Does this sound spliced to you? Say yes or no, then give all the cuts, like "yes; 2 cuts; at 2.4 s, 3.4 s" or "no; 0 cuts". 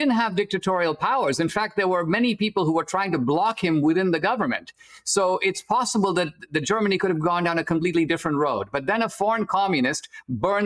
no; 0 cuts